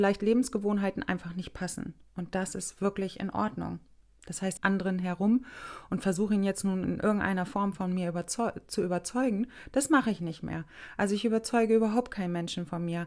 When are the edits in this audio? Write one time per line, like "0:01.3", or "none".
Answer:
0:04.6